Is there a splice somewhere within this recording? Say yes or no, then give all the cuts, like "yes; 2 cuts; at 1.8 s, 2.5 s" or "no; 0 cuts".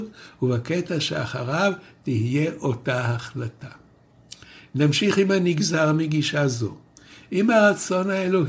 no; 0 cuts